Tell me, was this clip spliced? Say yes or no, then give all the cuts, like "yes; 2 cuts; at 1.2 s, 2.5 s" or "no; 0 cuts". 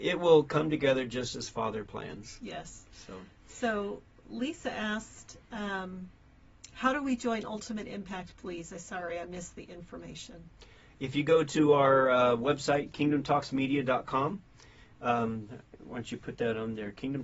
no; 0 cuts